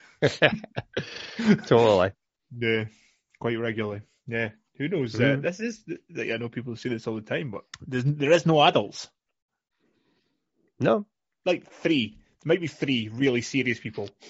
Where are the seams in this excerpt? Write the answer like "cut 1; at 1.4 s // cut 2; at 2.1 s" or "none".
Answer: cut 1; at 7.7 s